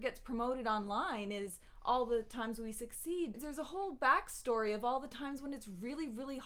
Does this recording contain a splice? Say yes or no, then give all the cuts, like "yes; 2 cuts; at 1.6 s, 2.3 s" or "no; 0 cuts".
yes; 1 cut; at 3.3 s